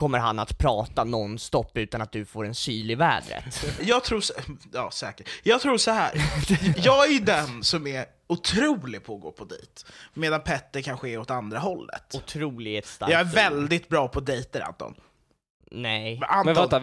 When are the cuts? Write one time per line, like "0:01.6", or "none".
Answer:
0:03.8
0:06.7